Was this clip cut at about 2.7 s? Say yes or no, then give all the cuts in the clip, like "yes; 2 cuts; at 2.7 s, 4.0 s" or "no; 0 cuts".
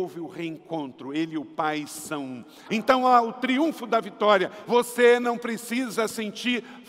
yes; 2 cuts; at 2.7 s, 4.6 s